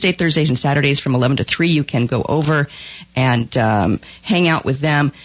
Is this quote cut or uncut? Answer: uncut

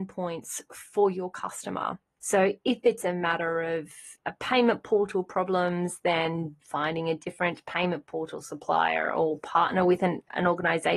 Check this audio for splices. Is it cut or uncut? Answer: cut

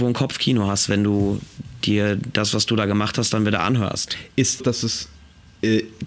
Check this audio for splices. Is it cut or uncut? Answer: cut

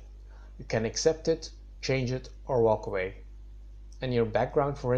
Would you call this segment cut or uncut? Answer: uncut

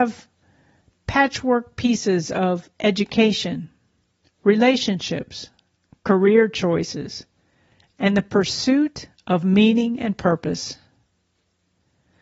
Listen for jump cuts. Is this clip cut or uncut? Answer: uncut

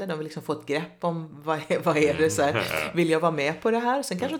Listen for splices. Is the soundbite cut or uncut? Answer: uncut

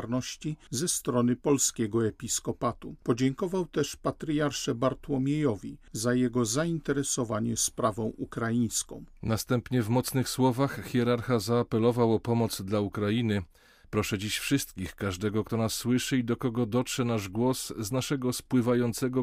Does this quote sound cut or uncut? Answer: uncut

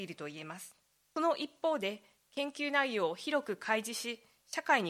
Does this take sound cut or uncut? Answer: cut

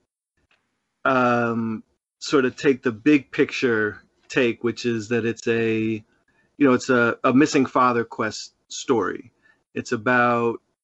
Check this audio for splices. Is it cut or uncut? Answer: uncut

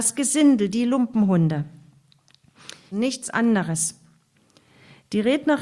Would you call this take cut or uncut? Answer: cut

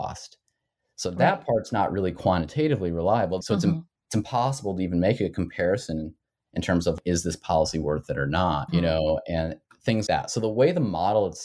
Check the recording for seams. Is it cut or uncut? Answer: cut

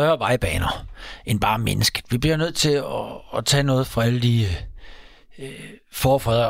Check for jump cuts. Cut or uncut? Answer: uncut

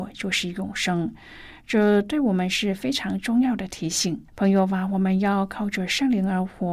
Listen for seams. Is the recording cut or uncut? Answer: cut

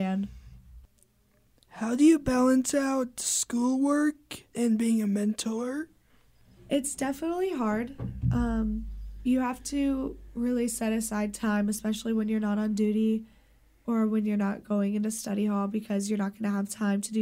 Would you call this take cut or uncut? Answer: cut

